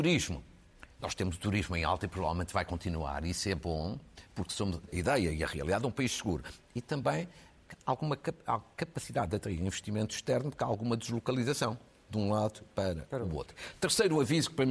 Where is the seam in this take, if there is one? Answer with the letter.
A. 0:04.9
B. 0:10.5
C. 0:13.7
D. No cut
A